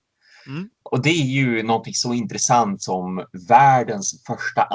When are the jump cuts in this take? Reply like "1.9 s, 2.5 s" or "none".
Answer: none